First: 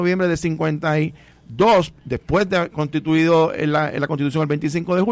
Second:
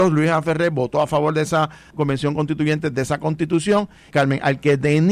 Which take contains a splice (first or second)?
second